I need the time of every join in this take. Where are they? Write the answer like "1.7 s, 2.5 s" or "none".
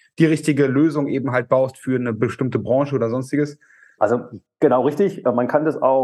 4.0 s

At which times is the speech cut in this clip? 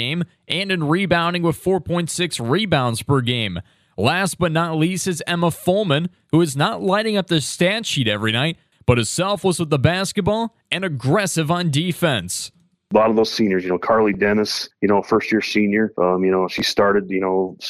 none

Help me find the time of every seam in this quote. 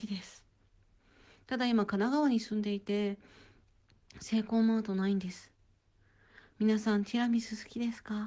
6.5 s

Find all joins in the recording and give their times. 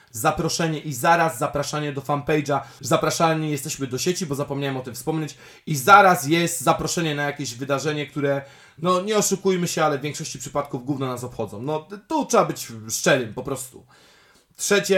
2.8 s

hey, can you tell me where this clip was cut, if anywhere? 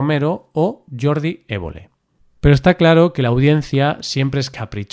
2.2 s

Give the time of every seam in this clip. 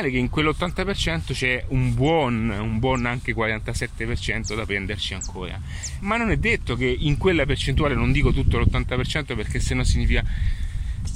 6.0 s

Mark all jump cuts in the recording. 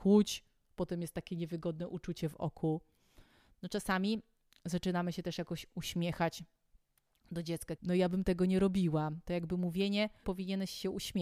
7.8 s, 10.2 s

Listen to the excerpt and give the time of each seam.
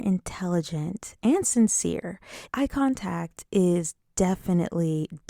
2.5 s

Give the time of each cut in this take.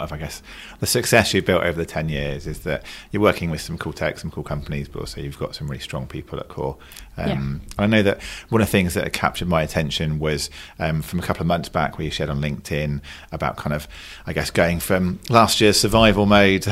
none

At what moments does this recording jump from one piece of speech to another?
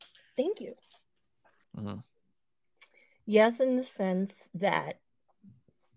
1.6 s

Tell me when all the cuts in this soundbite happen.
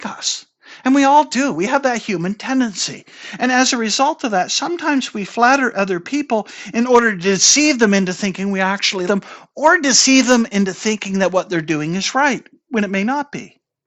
9.1 s

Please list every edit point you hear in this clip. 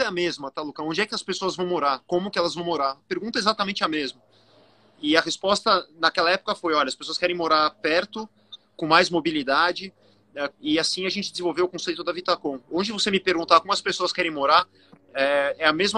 10.5 s

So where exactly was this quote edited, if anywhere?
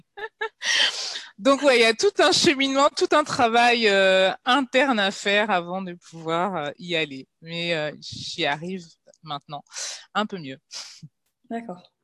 none

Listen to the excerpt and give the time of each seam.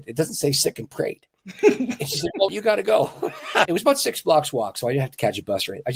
2.5 s, 3.7 s

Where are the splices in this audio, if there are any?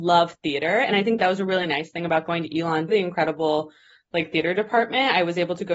2.9 s

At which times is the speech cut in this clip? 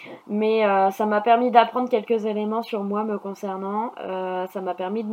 none

